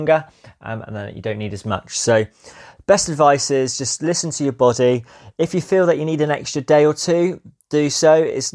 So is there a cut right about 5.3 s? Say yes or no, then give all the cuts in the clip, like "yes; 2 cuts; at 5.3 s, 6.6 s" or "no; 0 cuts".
no; 0 cuts